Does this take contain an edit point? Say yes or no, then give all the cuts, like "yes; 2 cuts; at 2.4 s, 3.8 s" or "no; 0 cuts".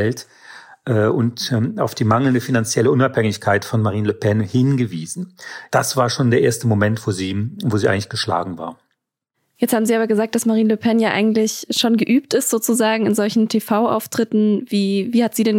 no; 0 cuts